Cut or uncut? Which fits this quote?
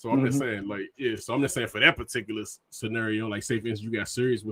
uncut